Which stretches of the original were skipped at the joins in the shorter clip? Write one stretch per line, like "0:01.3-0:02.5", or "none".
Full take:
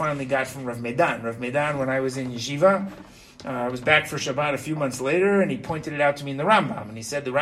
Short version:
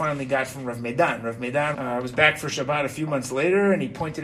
0:01.7-0:03.4